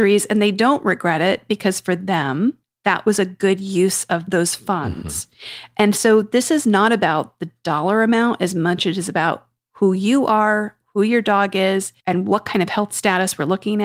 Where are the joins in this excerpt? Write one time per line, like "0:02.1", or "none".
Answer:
0:12.0